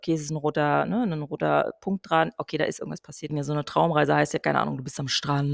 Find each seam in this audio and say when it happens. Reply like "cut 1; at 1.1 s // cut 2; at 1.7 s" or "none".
cut 1; at 3.3 s